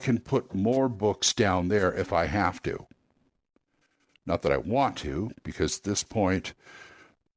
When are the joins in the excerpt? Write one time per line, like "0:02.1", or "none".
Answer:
0:05.4